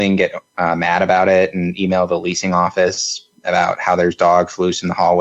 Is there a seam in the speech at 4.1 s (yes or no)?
no